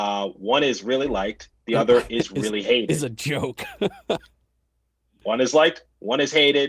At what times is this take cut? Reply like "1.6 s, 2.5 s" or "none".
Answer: none